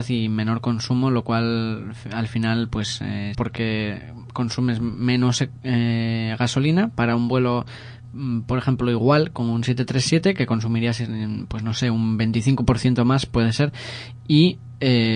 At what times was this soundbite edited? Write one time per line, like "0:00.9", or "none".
0:03.3